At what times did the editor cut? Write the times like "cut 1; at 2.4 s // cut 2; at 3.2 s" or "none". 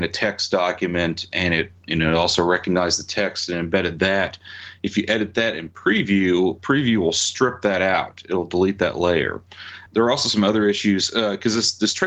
none